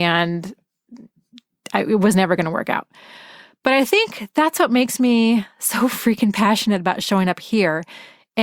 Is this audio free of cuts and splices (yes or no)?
yes